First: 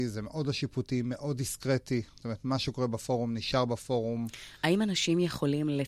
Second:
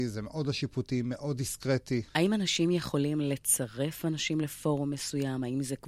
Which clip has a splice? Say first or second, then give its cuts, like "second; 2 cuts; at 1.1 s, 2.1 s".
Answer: second; 1 cut; at 2.1 s